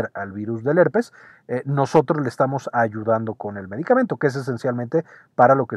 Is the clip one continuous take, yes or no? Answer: yes